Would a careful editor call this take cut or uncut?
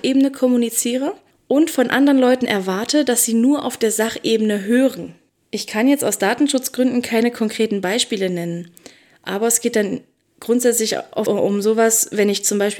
cut